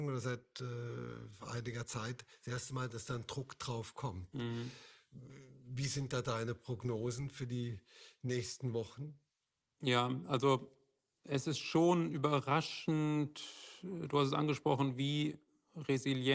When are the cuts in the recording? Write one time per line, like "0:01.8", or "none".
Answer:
none